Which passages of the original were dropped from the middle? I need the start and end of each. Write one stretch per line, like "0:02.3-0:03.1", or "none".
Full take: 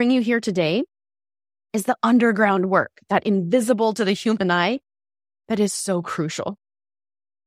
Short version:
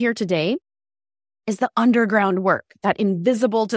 none